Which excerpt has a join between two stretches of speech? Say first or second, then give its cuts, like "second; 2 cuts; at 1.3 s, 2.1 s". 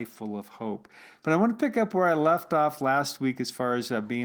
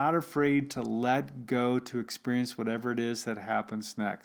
first; 1 cut; at 1.2 s